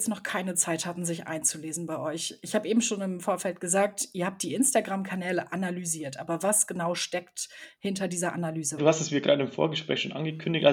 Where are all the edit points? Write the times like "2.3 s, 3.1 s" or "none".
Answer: 8.8 s